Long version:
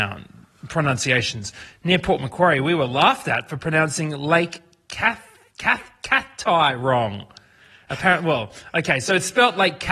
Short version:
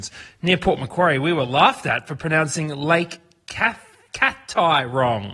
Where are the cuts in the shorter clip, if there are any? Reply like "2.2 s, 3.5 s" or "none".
4.1 s